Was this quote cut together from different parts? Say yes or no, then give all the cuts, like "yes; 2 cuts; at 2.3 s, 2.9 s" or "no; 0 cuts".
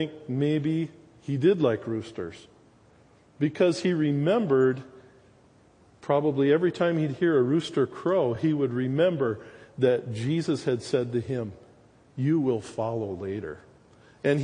no; 0 cuts